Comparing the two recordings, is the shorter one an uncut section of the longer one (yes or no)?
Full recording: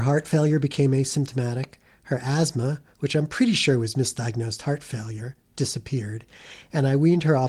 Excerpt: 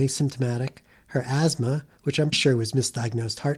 no